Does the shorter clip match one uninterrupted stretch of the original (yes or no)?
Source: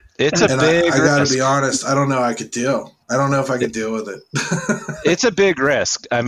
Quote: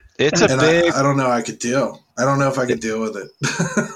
no